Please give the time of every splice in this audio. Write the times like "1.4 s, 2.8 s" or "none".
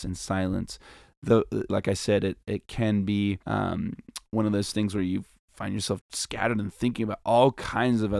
1.7 s, 3.4 s, 6.0 s

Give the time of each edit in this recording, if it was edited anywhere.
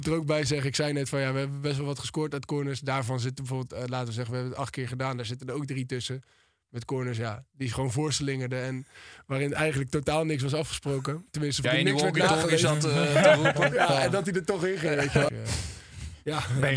11.6 s, 15.3 s

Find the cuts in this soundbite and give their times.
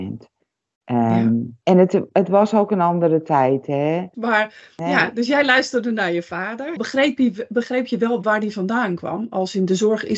1.6 s, 4.1 s, 6.8 s

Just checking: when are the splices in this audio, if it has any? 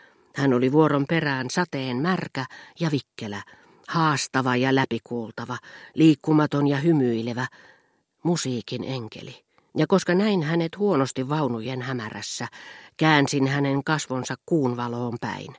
9.7 s

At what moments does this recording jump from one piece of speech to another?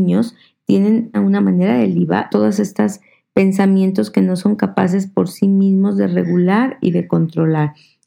1.1 s, 2.3 s

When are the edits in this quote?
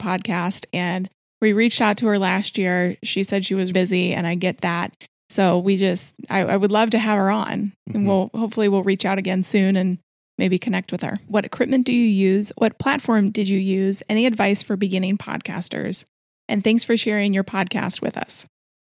3.7 s, 11.3 s

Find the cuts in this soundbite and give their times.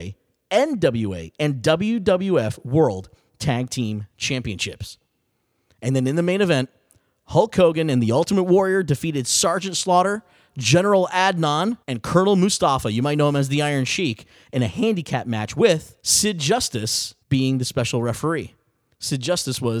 11.8 s, 16.0 s, 17.2 s

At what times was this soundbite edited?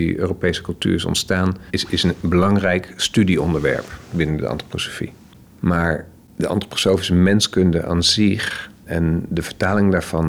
none

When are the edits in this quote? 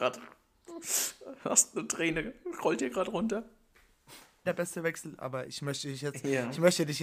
4.5 s

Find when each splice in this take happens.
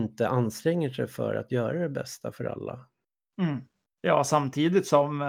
3.9 s

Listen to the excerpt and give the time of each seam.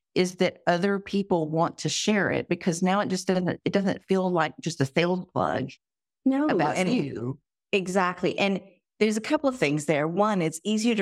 none

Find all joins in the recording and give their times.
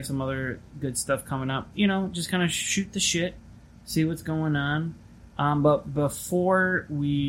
1.7 s

